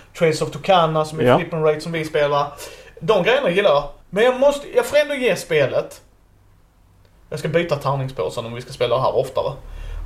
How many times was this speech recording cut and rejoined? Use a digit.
1